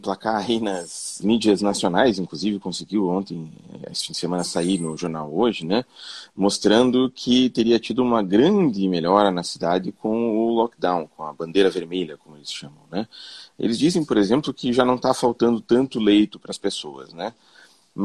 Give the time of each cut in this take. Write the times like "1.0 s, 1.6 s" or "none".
1.2 s, 13.5 s